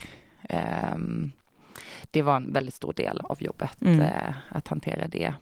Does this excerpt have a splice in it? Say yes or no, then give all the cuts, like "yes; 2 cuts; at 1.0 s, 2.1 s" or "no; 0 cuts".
yes; 1 cut; at 3.2 s